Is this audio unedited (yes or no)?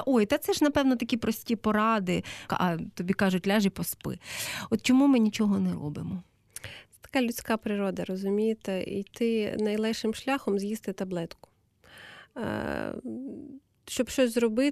no